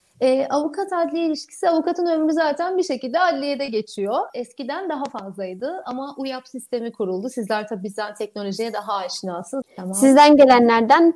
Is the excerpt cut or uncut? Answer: cut